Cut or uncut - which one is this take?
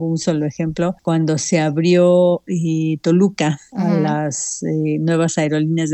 uncut